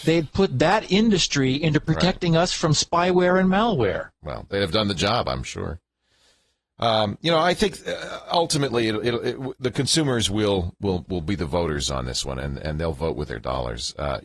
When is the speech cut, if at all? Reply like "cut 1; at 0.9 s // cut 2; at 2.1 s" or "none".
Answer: none